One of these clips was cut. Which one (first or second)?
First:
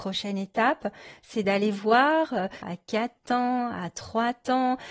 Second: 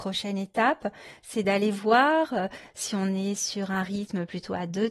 first